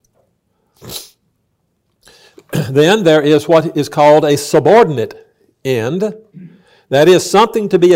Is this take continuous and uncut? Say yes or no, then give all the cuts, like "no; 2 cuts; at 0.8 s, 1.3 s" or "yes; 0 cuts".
yes; 0 cuts